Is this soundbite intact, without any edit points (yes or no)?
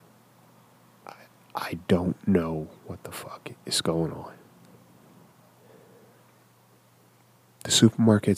yes